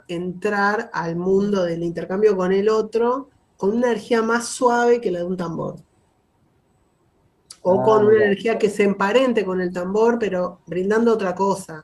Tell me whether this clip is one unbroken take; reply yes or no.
yes